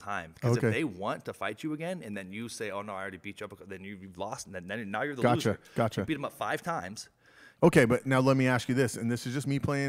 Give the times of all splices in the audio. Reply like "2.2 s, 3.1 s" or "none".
7.6 s